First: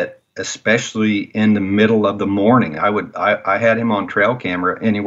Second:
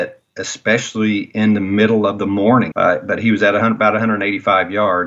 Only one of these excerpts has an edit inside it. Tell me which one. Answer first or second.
second